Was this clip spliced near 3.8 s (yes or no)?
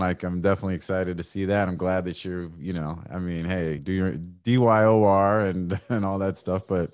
yes